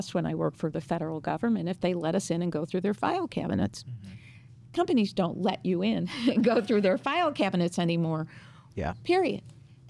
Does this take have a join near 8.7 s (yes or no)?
yes